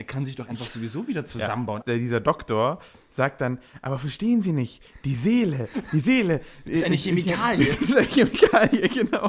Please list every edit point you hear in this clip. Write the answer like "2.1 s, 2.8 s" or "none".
1.8 s